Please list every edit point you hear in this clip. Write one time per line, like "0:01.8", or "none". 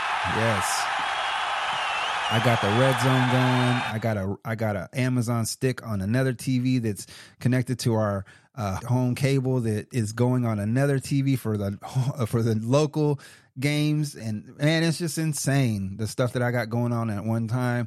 0:03.9
0:08.8